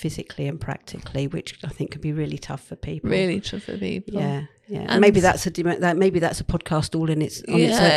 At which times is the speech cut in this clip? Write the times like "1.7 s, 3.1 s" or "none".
none